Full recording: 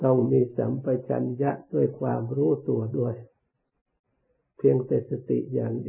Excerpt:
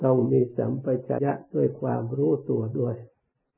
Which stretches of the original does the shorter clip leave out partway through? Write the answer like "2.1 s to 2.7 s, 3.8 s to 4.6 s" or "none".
1.2 s to 1.4 s

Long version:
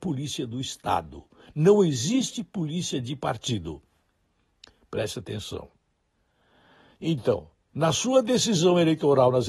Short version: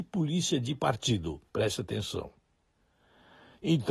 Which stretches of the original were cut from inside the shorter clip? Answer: 3.9 s to 4.8 s

